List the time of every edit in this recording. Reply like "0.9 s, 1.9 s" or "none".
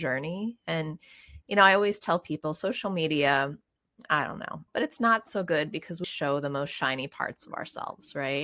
4.7 s, 6.0 s